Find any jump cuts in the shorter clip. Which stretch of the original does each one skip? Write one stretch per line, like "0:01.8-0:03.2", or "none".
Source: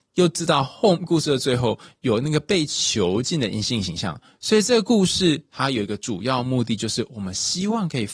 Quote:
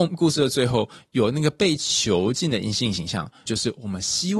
0:04.3-0:06.8